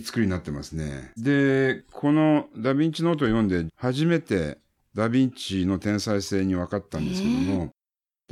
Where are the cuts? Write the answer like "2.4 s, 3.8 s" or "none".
1.2 s, 3.7 s